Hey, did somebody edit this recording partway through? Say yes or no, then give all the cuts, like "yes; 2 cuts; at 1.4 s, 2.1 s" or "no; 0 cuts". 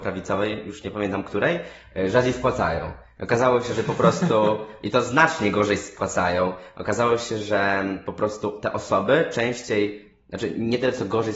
no; 0 cuts